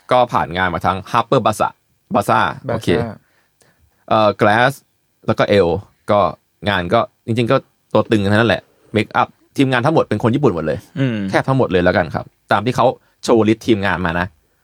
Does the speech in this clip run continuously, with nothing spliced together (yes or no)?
yes